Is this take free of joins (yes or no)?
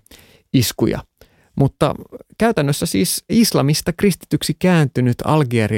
yes